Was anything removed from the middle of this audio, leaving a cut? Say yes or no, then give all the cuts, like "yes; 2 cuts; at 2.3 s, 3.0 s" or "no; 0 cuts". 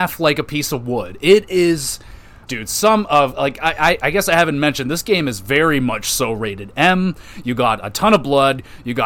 yes; 1 cut; at 2.5 s